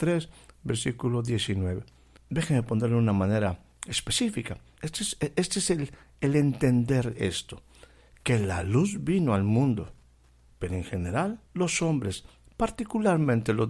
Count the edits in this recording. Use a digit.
3